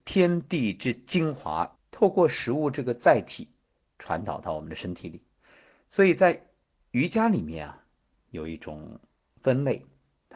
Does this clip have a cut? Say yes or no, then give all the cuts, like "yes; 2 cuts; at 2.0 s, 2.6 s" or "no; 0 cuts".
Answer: yes; 1 cut; at 1.8 s